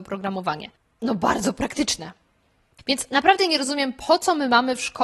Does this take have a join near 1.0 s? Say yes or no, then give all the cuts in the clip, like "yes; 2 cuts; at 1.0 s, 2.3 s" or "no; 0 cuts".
no; 1 cut; at 2.8 s